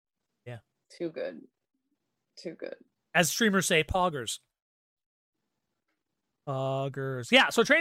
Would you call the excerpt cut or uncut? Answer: uncut